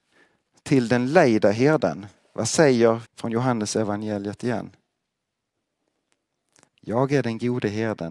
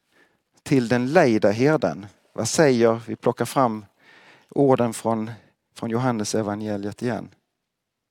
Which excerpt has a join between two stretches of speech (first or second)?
first